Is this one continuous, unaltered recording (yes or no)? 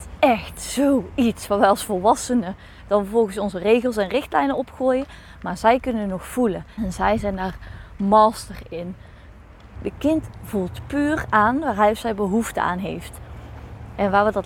no